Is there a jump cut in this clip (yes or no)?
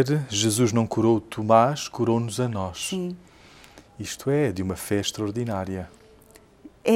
no